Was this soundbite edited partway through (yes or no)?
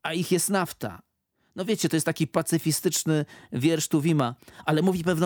no